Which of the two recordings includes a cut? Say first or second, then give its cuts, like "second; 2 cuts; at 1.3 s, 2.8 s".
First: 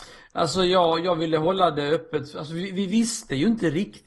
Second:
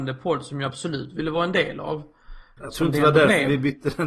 second; 1 cut; at 2.6 s